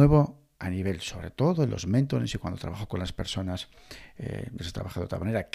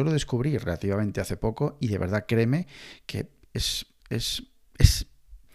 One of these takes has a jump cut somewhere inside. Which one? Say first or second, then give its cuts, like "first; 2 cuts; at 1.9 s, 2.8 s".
first; 1 cut; at 4.6 s